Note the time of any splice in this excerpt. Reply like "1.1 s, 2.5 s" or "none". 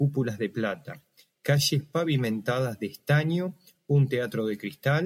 1.4 s

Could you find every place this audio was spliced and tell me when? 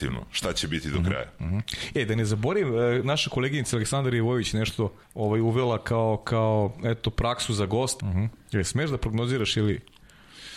5.0 s, 8.0 s

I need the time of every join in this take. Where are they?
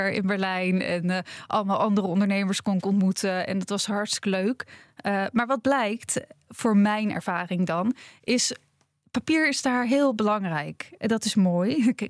none

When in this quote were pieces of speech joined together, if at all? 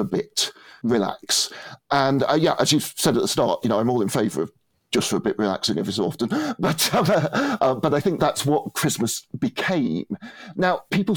none

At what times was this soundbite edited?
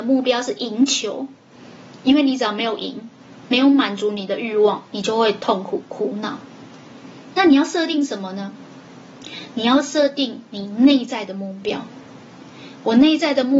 none

